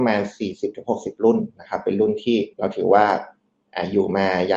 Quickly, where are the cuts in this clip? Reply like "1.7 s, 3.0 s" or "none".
2.5 s